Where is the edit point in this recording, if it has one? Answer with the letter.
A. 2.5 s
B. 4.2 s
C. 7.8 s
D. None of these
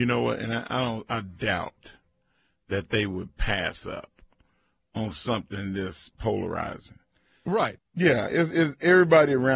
C